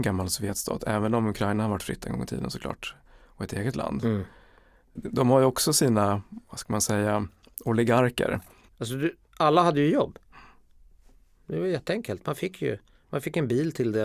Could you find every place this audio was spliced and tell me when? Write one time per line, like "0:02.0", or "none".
0:05.0
0:08.7